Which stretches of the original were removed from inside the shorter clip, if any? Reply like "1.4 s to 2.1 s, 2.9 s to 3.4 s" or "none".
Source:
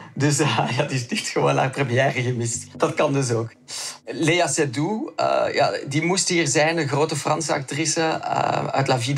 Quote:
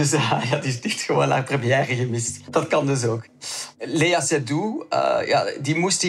none